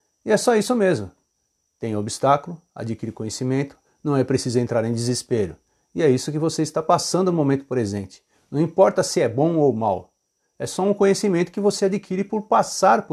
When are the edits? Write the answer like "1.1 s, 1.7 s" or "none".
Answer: none